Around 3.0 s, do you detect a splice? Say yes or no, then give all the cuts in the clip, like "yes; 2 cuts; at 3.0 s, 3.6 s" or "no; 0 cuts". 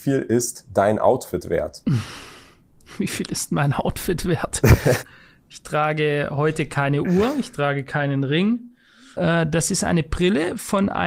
no; 2 cuts; at 5.0 s, 9.1 s